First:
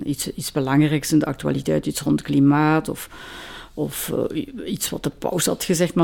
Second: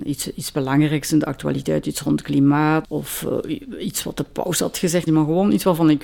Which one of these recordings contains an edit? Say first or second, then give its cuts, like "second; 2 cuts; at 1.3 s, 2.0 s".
second; 2 cuts; at 2.8 s, 5.1 s